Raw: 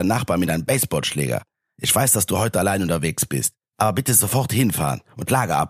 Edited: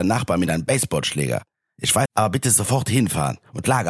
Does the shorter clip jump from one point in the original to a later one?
yes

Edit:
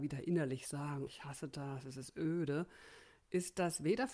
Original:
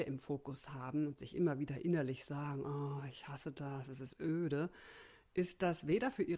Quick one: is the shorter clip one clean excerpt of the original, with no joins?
no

